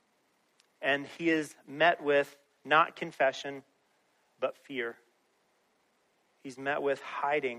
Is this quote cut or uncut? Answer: uncut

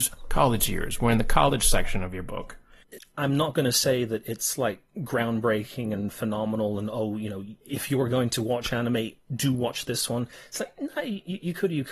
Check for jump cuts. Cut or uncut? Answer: cut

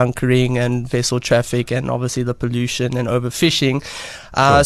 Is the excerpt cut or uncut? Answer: uncut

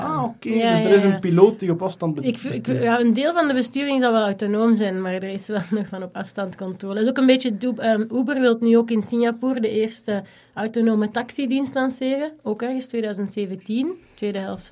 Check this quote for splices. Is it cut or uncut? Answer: cut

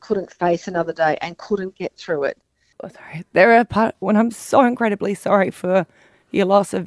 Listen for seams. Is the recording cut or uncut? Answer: cut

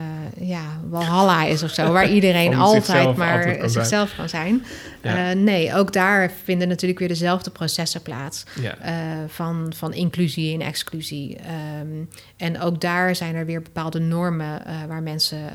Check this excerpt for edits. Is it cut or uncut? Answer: uncut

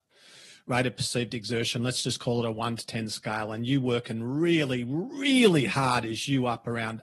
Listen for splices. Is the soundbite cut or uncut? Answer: uncut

